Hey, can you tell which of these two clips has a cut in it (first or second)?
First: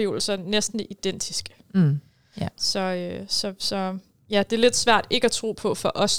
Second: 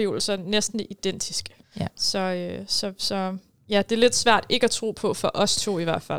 second